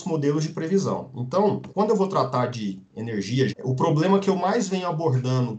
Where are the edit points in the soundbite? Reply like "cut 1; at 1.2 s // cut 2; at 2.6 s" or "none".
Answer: cut 1; at 1.7 s // cut 2; at 3.5 s